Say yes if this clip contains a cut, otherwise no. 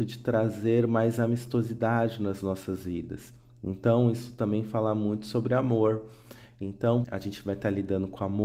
yes